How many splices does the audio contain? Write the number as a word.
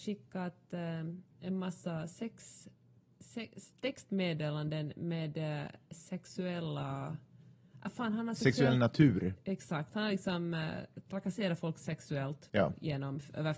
zero